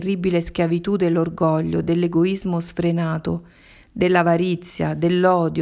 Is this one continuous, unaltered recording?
yes; 0 cuts

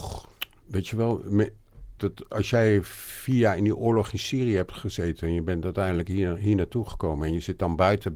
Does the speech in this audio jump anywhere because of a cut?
yes; 1 cut; at 2.0 s

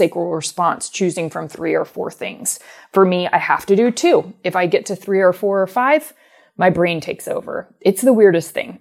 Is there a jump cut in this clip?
no; 0 cuts

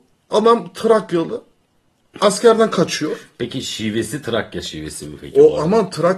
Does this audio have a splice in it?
no; 0 cuts

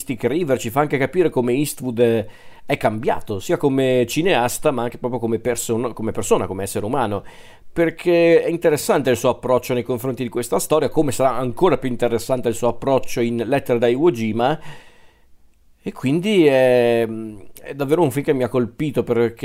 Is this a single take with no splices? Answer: yes; 0 cuts

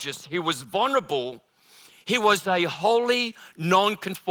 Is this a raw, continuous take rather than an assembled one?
yes; 0 cuts

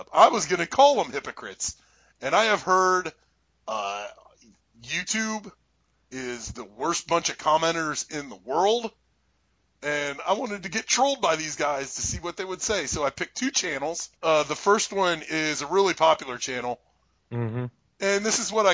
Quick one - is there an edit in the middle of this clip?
yes; 2 cuts; at 14.2 s, 17.2 s

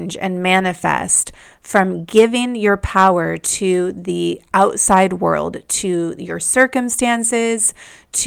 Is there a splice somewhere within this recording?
no; 0 cuts

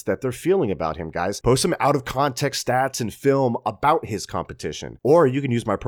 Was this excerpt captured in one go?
no; 1 cut; at 1.4 s

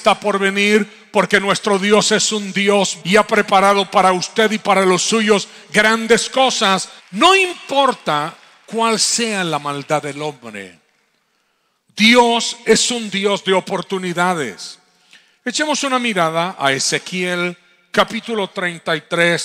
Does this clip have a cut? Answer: yes; 2 cuts; at 3.0 s, 7.0 s

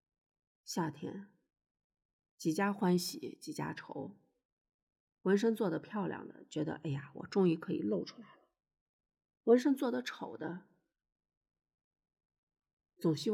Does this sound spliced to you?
no; 0 cuts

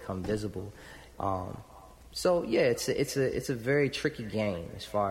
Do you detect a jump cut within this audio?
yes; 1 cut; at 1.1 s

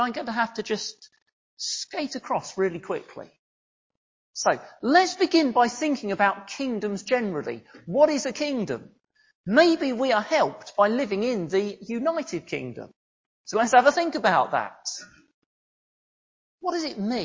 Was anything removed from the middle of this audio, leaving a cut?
no; 0 cuts

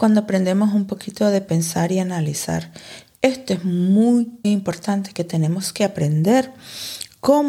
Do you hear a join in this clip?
yes; 1 cut; at 4.4 s

